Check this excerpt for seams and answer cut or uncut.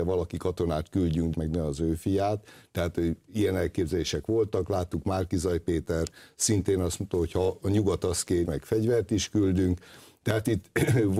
cut